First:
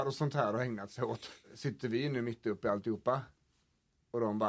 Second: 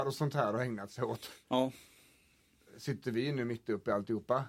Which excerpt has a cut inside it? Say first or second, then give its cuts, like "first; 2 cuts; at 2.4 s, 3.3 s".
first; 1 cut; at 1.4 s